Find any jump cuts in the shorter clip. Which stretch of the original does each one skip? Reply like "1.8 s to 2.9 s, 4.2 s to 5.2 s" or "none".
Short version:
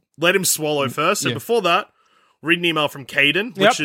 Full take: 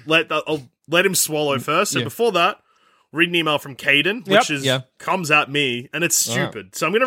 none